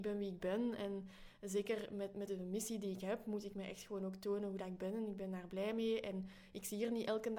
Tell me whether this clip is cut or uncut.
cut